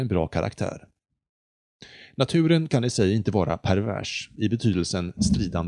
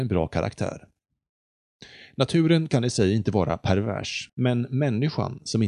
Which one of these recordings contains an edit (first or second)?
second